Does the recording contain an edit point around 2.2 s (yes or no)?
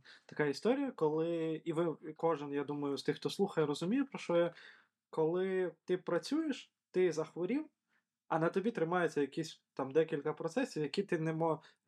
yes